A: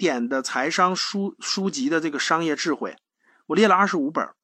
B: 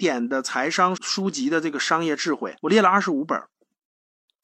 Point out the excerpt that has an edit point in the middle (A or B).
B